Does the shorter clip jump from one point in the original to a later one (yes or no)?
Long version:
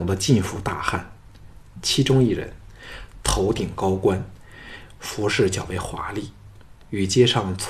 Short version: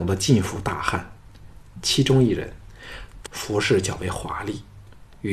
yes